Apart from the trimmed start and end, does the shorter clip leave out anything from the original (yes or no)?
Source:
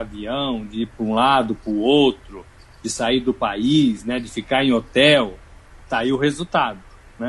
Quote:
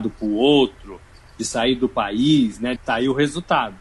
yes